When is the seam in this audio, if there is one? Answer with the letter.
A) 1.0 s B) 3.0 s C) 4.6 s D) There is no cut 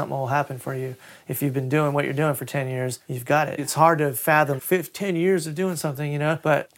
C